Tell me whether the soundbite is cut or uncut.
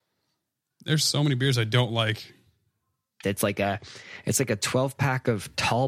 cut